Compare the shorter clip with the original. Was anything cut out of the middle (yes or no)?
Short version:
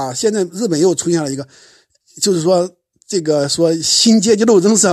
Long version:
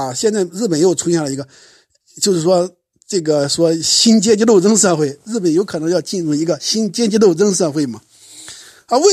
no